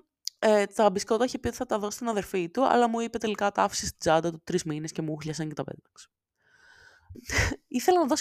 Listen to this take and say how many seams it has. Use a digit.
1